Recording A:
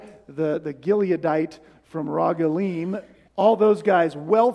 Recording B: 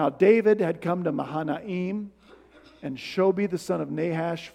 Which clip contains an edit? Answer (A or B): A